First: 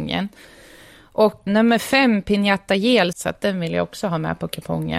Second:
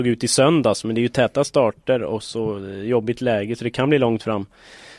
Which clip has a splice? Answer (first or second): first